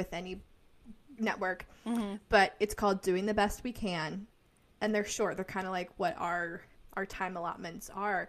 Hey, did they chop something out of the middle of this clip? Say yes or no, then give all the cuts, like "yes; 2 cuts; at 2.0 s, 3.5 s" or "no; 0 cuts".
no; 0 cuts